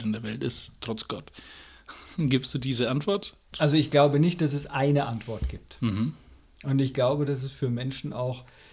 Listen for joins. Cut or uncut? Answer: cut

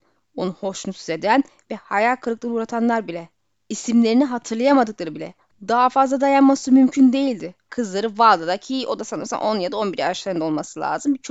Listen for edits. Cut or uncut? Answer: cut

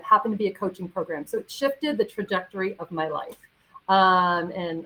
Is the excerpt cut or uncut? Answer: uncut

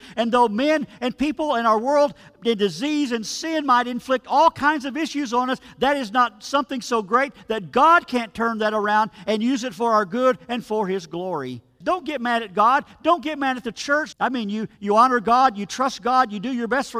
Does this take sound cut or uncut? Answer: cut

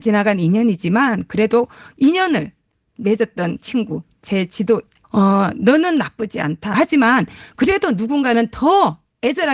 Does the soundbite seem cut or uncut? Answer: cut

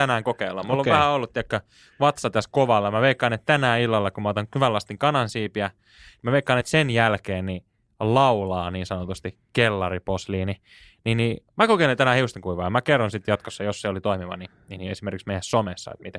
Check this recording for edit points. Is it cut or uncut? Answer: uncut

